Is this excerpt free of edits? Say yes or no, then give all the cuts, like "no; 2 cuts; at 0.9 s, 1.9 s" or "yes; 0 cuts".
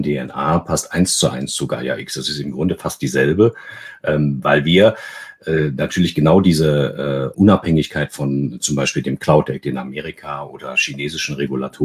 no; 1 cut; at 7.3 s